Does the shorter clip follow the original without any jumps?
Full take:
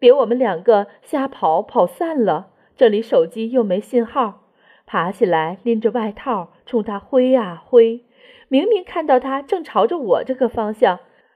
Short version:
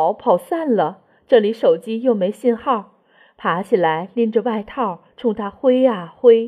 yes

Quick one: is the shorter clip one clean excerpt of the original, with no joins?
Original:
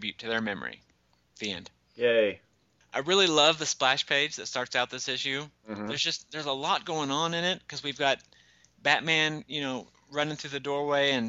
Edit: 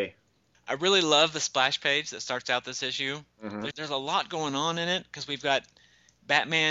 no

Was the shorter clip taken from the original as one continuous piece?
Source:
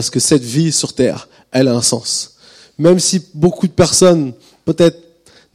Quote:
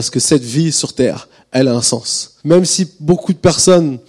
no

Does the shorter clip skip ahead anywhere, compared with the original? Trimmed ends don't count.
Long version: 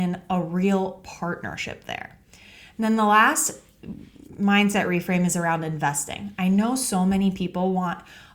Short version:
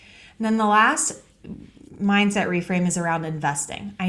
no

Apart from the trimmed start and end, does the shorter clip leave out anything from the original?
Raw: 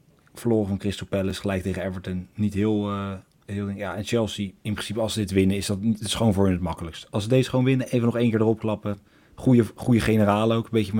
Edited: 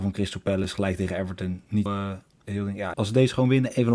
yes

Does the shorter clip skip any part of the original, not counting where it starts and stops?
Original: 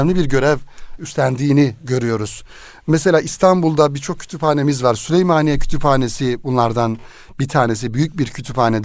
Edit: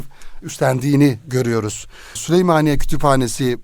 yes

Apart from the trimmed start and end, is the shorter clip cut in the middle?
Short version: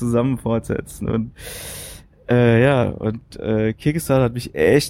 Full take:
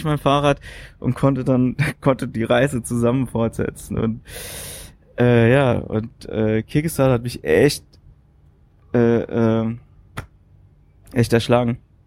no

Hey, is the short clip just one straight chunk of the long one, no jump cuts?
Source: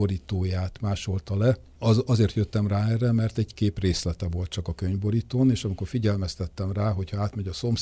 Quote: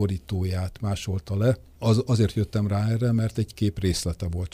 yes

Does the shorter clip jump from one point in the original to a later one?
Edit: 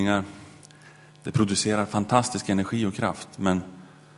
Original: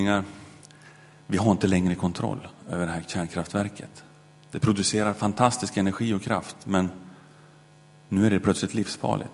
yes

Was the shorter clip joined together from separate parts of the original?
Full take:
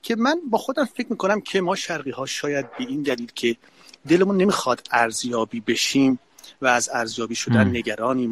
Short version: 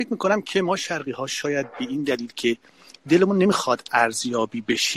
no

